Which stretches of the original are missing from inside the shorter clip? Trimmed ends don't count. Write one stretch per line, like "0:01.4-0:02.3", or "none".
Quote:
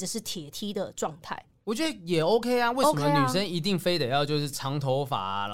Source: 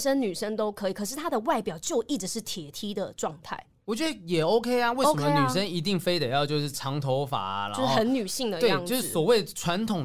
none